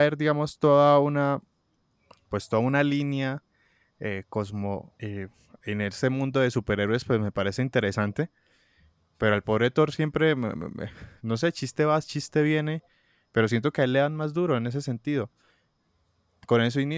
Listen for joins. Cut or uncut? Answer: cut